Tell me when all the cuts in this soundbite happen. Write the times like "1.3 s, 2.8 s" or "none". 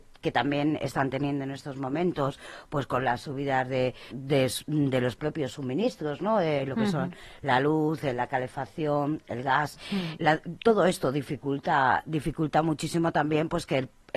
4.1 s, 10.2 s